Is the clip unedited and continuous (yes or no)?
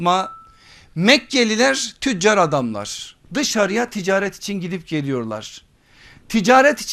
no